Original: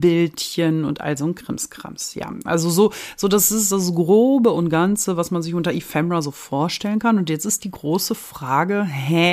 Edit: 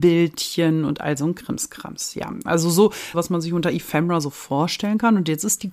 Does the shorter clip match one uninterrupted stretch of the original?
no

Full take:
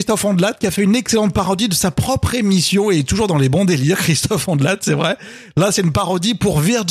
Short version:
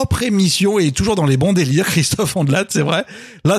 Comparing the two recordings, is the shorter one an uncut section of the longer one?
yes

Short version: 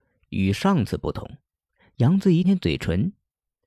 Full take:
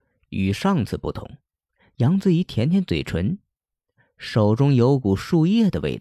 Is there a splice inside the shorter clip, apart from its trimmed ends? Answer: yes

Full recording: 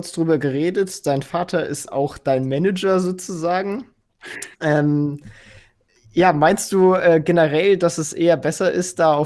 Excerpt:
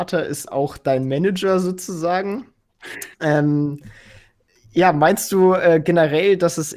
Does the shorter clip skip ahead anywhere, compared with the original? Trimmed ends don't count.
no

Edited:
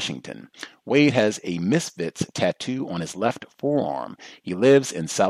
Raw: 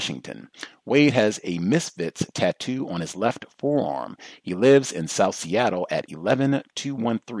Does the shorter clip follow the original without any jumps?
yes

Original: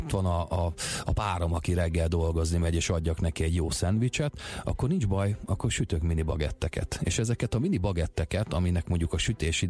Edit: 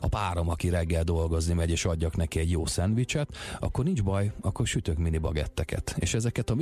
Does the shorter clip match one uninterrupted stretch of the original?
yes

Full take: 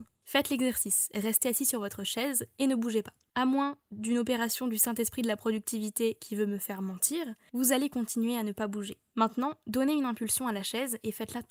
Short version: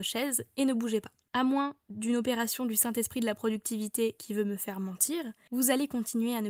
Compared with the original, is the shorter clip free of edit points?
yes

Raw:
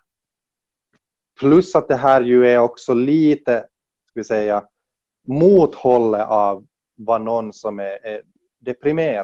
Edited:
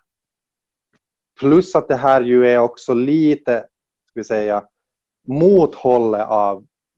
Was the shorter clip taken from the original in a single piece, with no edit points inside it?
yes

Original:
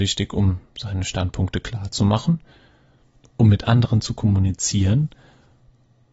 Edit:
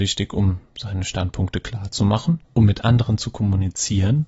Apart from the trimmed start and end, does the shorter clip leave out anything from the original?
yes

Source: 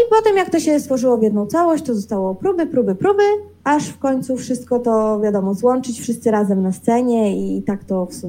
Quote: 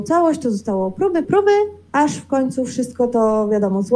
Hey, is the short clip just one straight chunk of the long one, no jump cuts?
no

